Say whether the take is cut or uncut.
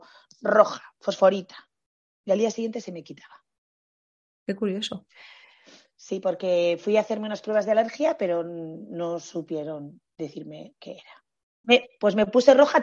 cut